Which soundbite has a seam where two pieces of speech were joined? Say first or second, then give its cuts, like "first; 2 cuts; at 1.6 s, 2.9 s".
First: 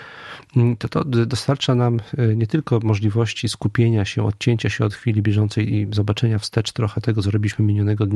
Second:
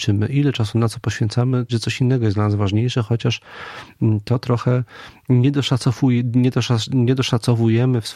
second; 1 cut; at 1.7 s